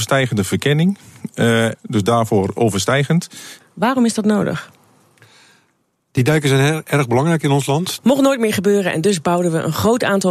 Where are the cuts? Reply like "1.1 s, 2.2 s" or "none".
1.7 s, 3.6 s, 8.0 s